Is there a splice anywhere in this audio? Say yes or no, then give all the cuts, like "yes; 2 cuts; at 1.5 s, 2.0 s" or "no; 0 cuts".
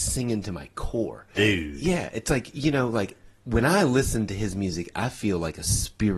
yes; 1 cut; at 1.4 s